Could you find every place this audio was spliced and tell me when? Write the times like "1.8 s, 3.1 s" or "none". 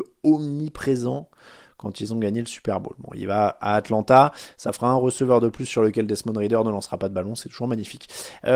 none

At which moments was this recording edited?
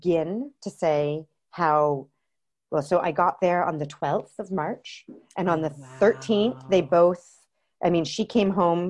none

